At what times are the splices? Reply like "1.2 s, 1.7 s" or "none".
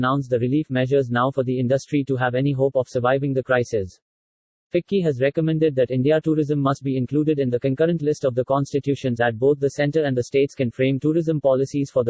4.6 s, 9.2 s